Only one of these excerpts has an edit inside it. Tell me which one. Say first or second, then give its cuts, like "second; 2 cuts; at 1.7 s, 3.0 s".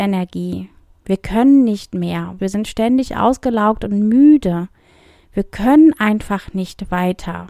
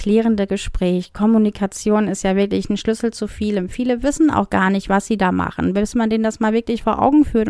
first; 1 cut; at 2.4 s